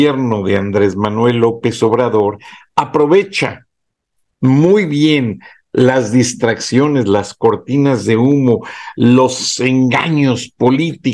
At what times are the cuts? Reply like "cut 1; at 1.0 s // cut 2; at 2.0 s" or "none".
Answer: none